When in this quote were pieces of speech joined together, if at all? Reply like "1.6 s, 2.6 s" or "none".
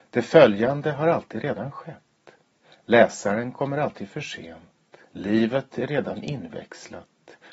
5.0 s